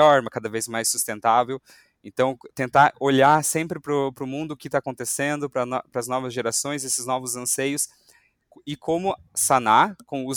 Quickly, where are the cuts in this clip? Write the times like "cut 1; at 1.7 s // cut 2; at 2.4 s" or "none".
none